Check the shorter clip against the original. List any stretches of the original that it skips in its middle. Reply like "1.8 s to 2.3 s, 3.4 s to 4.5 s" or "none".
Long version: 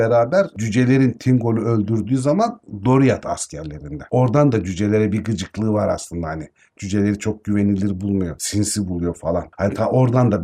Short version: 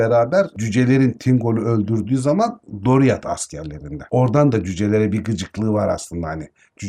none